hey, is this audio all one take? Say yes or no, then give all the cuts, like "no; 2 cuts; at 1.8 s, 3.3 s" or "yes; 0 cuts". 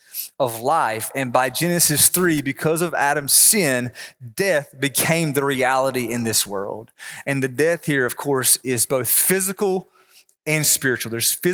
yes; 0 cuts